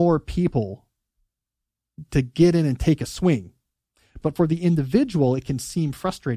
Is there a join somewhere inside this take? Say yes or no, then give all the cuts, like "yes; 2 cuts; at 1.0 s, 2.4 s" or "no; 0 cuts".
yes; 1 cut; at 4.2 s